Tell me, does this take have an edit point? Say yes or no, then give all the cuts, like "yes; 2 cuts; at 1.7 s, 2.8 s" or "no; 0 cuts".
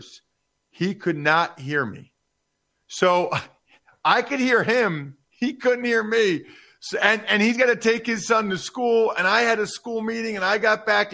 no; 0 cuts